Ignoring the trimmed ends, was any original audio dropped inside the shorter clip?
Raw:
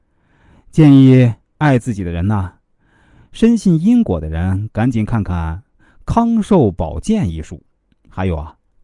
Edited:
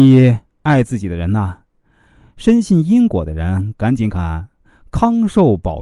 yes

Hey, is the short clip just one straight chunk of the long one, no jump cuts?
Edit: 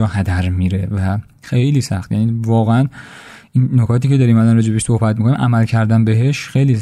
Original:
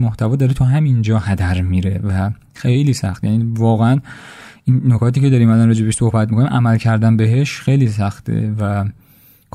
yes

